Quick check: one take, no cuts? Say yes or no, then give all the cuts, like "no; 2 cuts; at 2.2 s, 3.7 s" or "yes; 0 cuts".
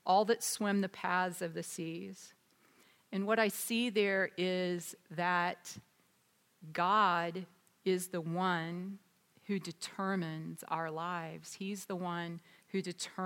yes; 0 cuts